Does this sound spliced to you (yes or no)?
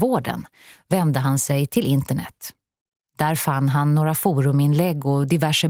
no